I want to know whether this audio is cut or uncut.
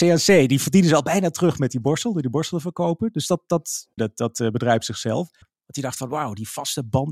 cut